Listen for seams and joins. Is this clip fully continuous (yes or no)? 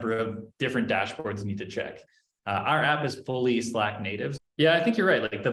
no